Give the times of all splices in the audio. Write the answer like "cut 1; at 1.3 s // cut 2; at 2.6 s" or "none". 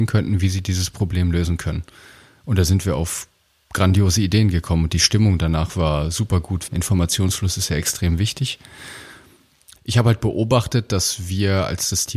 cut 1; at 6.7 s // cut 2; at 9.8 s